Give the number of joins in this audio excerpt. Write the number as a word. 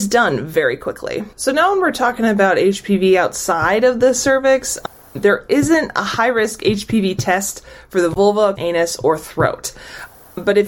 two